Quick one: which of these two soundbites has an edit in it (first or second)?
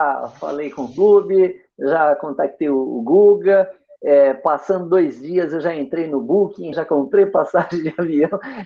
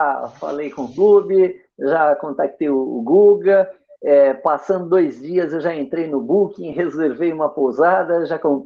first